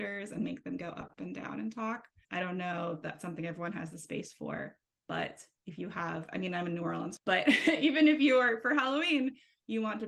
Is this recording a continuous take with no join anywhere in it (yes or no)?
no